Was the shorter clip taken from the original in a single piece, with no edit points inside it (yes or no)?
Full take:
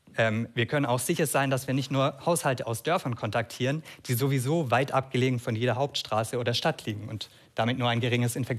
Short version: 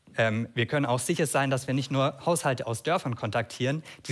yes